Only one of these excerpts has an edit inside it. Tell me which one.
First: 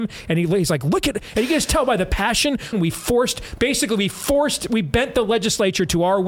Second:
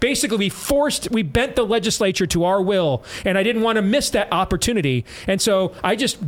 first; 1 cut; at 2.7 s

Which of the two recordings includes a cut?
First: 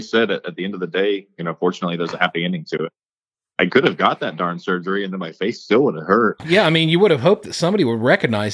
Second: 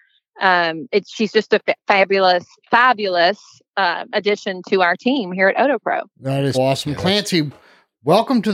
second; 1 cut; at 6.5 s

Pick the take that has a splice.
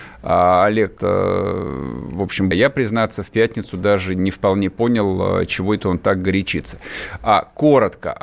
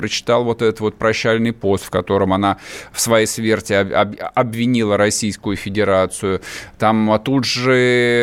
first; 2 cuts; at 1.0 s, 2.5 s

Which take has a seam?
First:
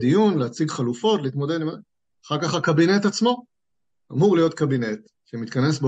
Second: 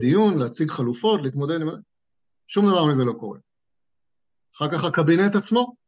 first; 1 cut; at 2.2 s

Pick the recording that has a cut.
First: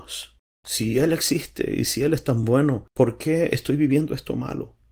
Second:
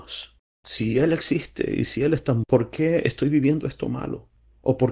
second; 1 cut; at 2.4 s

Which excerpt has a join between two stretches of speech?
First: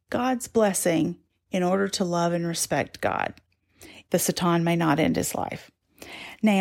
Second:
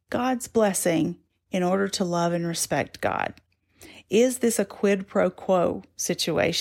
first; 1 cut; at 4.0 s

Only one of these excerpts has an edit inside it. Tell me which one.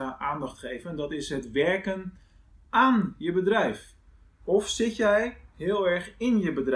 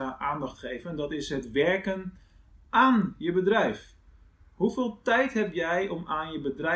first; 1 cut; at 4.4 s

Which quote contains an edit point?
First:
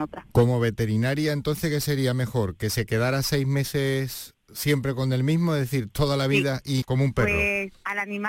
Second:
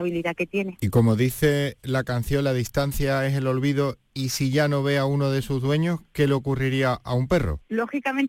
first; 1 cut; at 6.8 s

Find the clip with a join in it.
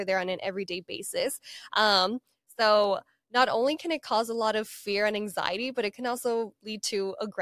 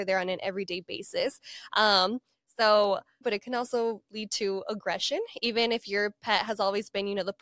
second; 1 cut; at 3.2 s

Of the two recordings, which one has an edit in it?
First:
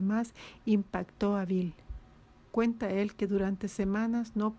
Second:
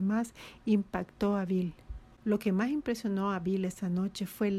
second; 1 cut; at 2.1 s

